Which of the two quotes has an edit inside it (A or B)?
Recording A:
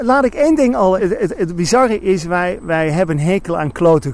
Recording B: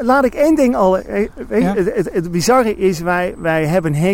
A